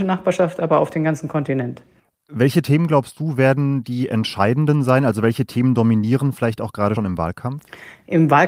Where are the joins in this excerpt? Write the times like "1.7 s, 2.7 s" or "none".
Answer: 7.0 s